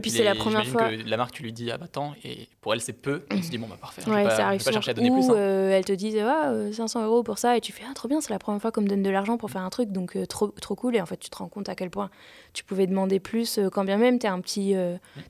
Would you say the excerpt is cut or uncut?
uncut